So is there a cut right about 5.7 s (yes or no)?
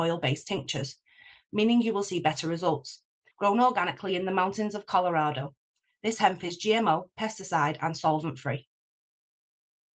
no